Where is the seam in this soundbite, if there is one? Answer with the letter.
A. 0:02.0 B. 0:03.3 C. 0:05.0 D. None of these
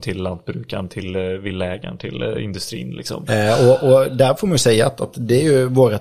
B